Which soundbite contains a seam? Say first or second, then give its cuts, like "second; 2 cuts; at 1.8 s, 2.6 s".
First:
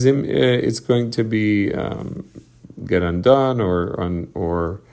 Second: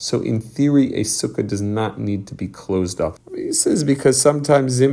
second; 1 cut; at 3.2 s